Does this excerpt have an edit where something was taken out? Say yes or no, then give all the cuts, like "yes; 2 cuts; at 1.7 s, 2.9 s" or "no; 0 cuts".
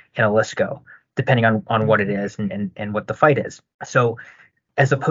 no; 0 cuts